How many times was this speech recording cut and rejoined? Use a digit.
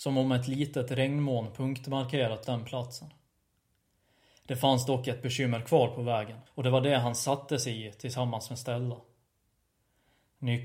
2